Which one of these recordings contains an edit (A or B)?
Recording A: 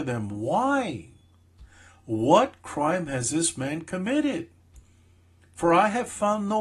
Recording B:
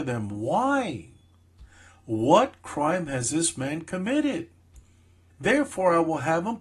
B